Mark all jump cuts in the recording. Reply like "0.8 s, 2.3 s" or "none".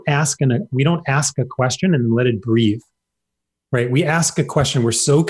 none